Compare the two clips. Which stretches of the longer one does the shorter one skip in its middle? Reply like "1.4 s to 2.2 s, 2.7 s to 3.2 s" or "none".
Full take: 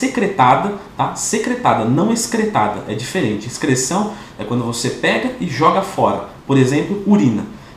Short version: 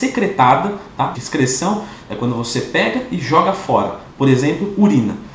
1.1 s to 3.4 s